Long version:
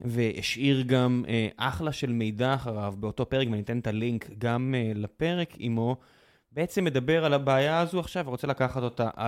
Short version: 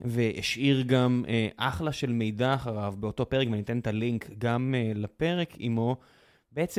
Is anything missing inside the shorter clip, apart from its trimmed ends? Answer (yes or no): no